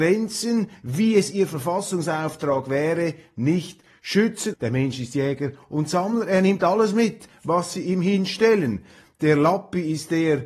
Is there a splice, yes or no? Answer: yes